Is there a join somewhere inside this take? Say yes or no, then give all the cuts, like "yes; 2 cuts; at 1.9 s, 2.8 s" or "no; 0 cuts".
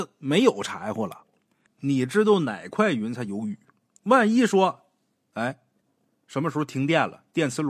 yes; 2 cuts; at 1.7 s, 4.0 s